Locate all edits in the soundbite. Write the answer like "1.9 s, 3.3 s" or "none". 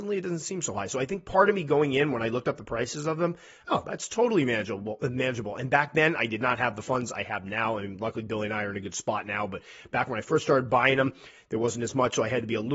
3.7 s